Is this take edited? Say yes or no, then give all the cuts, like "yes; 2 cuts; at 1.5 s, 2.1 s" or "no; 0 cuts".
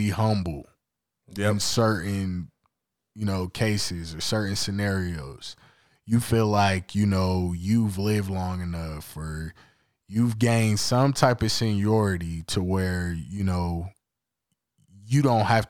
no; 0 cuts